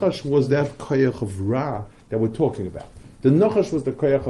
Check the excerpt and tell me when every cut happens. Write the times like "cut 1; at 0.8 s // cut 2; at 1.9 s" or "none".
none